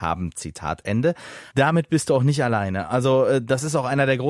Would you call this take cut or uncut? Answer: cut